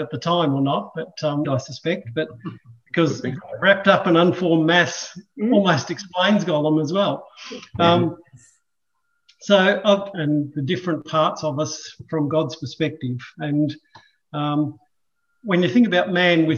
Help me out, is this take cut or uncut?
cut